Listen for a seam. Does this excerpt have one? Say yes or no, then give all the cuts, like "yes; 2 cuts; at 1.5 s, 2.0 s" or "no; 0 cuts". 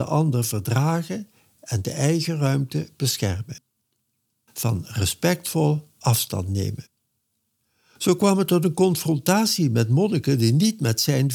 no; 0 cuts